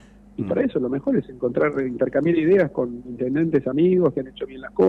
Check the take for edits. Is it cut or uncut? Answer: uncut